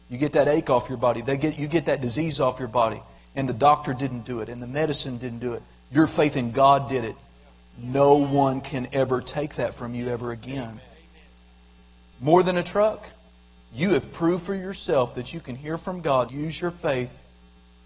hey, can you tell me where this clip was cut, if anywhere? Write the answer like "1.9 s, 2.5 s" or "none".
12.1 s, 16.3 s

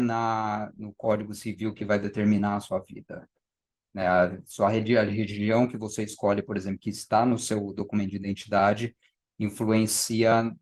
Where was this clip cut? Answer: none

